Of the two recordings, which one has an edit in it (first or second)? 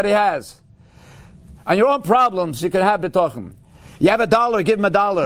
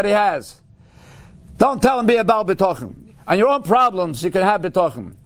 first